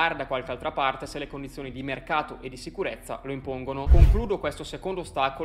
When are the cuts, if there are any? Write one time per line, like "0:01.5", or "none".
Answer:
0:03.9